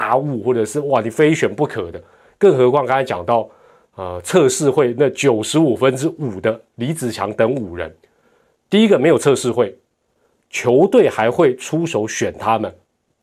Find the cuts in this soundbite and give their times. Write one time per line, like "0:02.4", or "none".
none